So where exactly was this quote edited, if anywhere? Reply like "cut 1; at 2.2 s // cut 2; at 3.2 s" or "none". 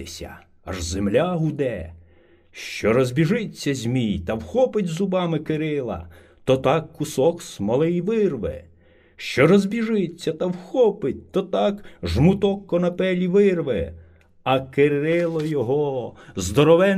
none